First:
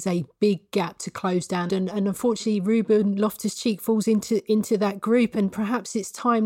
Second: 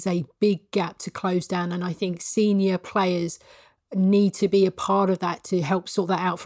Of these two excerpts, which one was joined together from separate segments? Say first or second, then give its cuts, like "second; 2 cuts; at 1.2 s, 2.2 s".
first; 1 cut; at 1.7 s